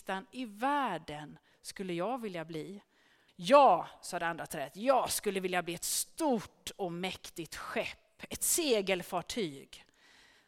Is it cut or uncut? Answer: cut